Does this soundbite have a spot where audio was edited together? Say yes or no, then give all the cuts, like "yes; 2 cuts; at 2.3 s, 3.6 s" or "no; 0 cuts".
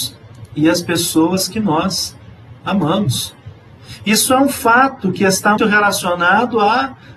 yes; 1 cut; at 5.6 s